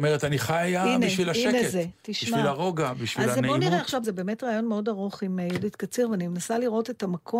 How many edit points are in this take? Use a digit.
1